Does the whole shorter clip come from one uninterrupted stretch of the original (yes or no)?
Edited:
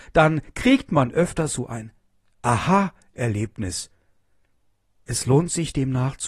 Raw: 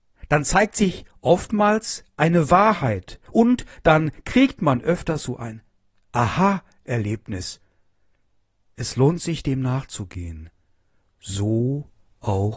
yes